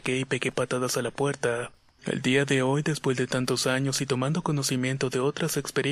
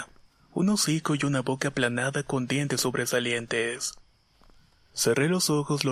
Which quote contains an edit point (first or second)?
first